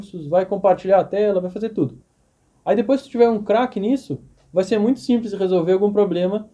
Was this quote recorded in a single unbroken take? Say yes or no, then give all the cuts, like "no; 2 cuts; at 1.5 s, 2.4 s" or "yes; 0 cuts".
yes; 0 cuts